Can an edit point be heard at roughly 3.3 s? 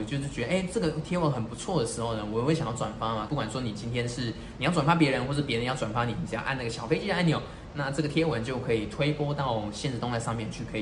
yes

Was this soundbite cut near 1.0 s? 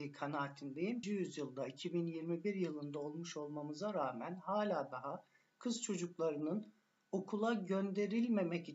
yes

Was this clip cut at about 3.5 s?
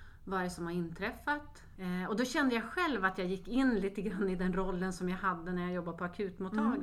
no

